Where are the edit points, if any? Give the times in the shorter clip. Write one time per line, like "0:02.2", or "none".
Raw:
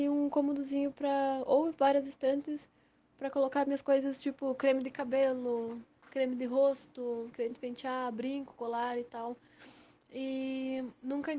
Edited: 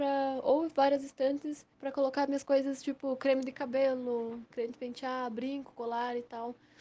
0:01.7
0:04.5